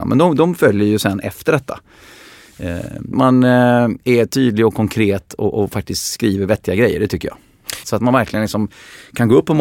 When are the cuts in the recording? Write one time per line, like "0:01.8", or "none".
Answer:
0:03.1
0:07.8